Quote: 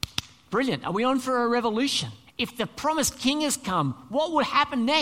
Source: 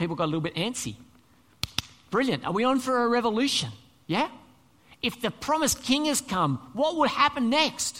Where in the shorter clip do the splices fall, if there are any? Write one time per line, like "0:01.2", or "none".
0:02.3